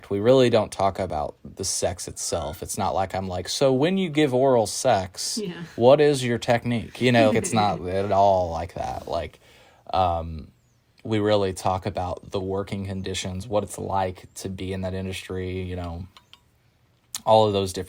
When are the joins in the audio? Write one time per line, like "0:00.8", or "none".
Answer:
0:07.3